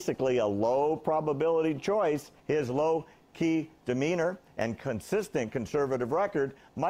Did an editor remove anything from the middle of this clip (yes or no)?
yes